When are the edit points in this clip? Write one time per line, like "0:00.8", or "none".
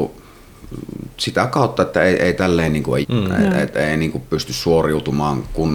0:03.0

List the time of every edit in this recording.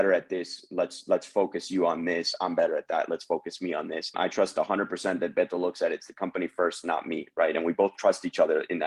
0:04.1

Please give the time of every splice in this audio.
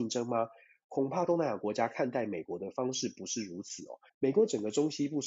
0:04.1

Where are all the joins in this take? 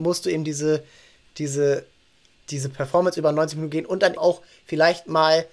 0:02.3
0:04.2

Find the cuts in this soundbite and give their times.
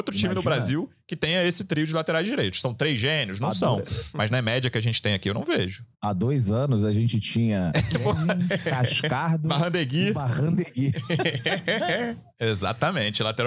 0:05.9

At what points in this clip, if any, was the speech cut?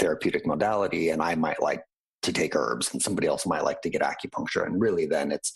none

